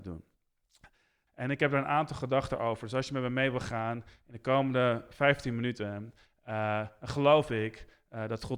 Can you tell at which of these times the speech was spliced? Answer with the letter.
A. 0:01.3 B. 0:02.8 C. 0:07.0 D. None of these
A